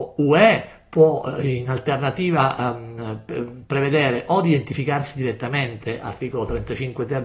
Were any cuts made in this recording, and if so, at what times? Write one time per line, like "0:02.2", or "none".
none